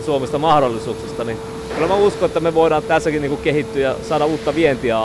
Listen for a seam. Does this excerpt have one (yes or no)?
yes